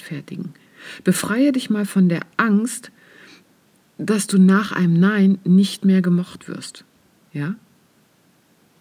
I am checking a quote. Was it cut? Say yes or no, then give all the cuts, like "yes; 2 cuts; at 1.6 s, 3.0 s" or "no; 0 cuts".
yes; 1 cut; at 7.2 s